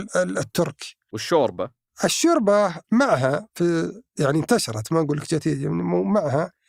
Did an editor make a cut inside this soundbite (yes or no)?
yes